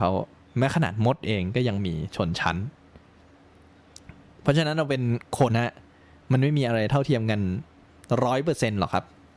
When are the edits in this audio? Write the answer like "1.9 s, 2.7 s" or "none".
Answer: 5.5 s